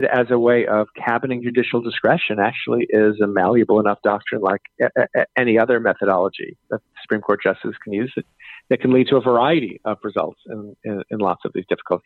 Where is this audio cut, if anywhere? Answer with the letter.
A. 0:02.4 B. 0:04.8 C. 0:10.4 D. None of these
D